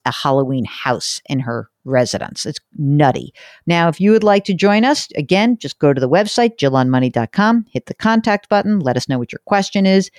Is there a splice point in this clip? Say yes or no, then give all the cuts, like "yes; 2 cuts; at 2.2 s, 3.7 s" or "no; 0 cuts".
no; 0 cuts